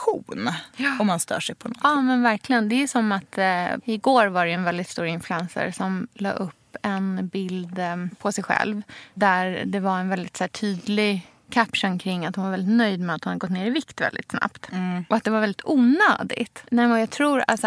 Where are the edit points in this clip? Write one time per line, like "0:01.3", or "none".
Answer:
0:03.8
0:15.1